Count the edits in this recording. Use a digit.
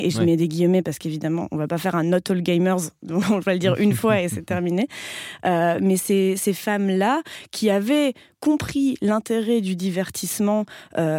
1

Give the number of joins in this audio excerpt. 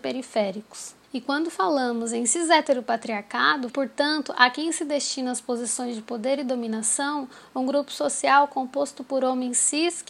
2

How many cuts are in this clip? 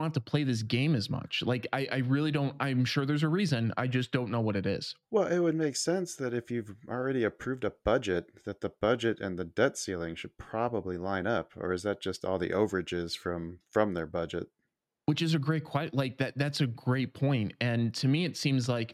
0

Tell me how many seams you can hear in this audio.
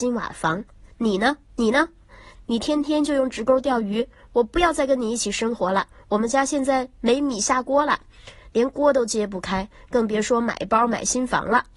1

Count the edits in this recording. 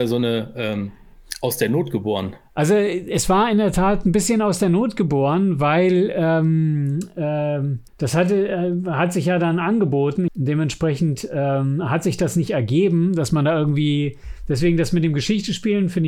2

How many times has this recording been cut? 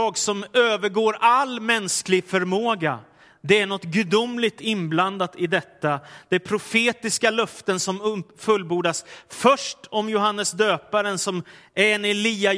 0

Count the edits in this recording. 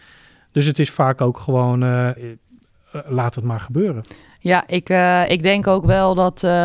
1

